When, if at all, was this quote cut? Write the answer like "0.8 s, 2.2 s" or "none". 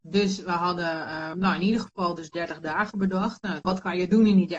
1.3 s, 3.6 s